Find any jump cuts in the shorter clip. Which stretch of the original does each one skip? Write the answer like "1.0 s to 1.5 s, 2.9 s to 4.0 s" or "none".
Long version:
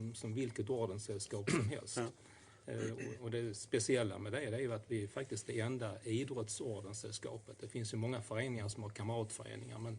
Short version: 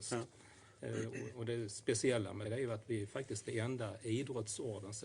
4.3 s to 4.5 s